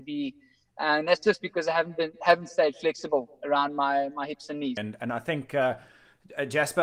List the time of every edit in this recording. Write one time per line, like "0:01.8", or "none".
0:04.8